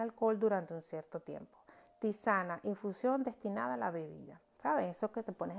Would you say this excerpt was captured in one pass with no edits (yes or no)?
no